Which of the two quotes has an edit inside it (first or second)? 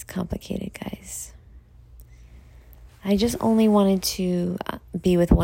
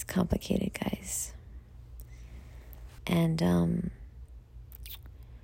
second